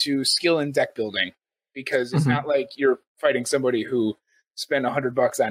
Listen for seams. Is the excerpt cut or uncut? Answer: uncut